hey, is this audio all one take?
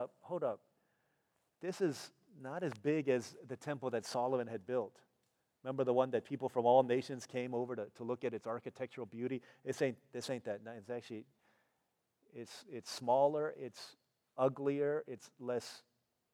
yes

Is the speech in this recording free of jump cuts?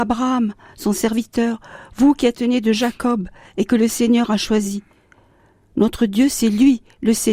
yes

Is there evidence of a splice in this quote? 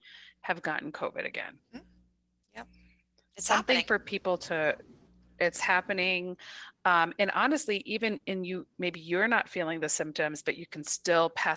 no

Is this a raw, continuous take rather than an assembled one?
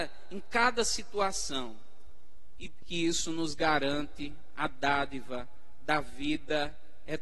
no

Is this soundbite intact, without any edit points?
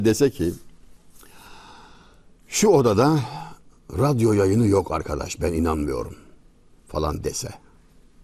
yes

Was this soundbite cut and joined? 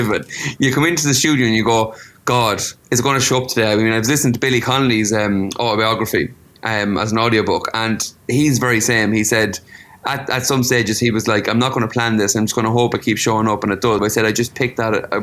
yes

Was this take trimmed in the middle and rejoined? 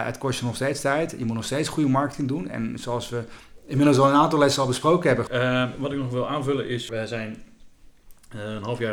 yes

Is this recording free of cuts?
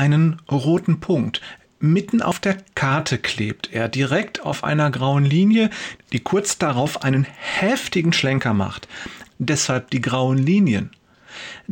no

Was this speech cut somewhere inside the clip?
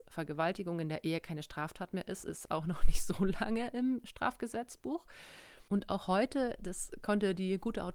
yes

